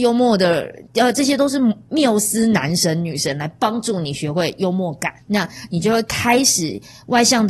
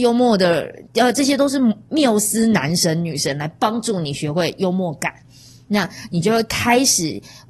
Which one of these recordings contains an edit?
first; 1 cut; at 5.2 s

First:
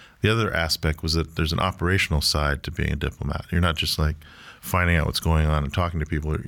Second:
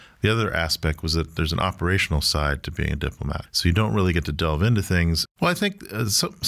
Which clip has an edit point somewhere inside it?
second; 2 cuts; at 3.5 s, 5.3 s

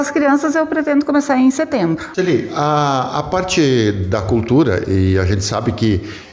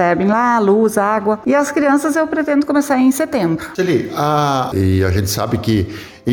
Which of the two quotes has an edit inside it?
second; 2 cuts; at 1.4 s, 4.7 s

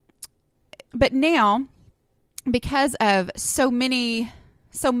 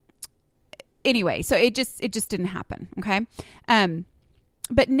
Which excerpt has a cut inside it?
first; 1 cut; at 0.9 s

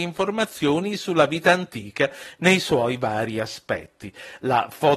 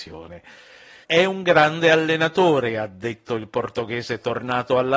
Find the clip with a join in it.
second; 1 cut; at 1.0 s

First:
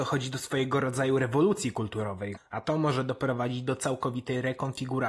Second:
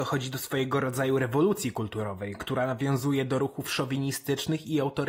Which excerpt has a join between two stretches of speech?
first; 1 cut; at 2.4 s

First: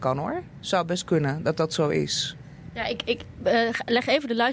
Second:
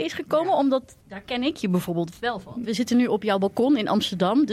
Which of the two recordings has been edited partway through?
second; 2 cuts; at 1.0 s, 2.6 s

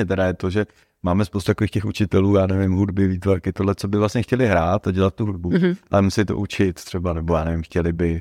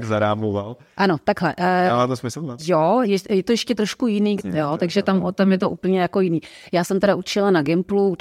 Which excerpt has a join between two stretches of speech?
second; 2 cuts; at 2.6 s, 4.4 s

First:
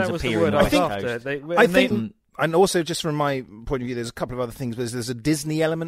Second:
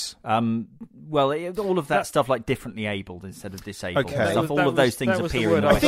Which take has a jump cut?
first; 1 cut; at 1.9 s

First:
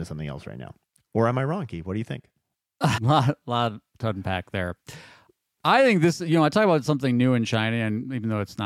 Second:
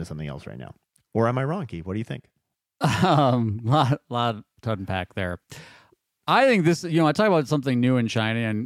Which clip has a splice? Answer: first; 1 cut; at 3.0 s

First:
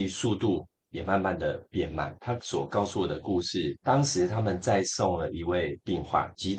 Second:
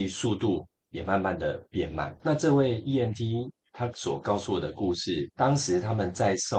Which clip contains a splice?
first; 1 cut; at 2.2 s

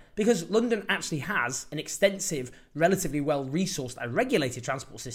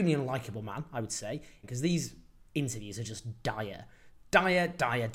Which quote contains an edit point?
second; 1 cut; at 1.6 s

